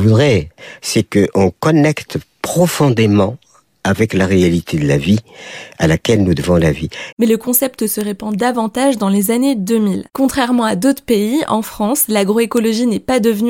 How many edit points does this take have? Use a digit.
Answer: 1